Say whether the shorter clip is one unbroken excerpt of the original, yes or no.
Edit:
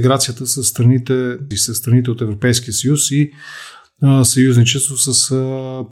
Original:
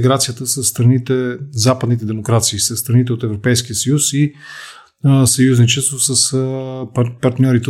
no